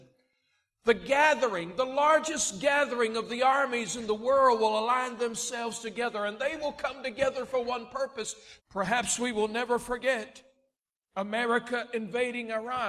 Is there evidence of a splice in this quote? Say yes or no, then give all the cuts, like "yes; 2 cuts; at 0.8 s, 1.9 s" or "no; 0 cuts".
yes; 1 cut; at 8.6 s